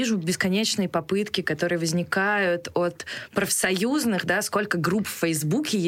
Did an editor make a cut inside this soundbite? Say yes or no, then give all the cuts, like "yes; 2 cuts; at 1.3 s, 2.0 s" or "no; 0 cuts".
no; 0 cuts